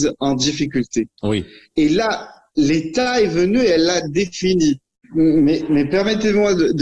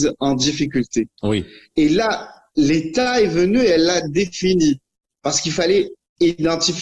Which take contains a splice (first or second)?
first